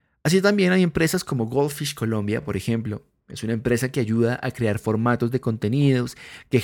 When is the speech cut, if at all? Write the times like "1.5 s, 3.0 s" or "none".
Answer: none